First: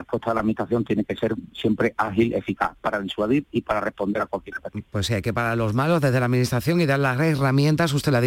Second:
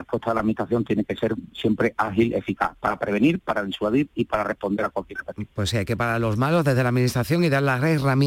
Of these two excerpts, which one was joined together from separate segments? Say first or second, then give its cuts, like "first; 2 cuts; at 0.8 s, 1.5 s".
first; 1 cut; at 2.8 s